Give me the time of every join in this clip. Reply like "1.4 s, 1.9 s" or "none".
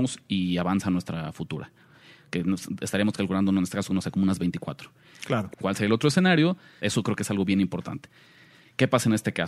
5.5 s, 6.8 s

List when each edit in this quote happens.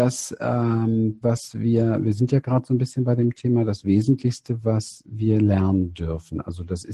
1.2 s

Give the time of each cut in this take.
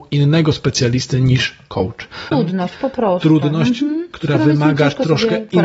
2.3 s

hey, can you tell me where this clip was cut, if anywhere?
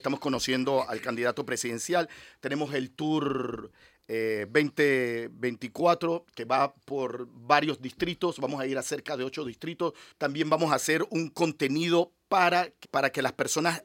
10.1 s, 12.8 s

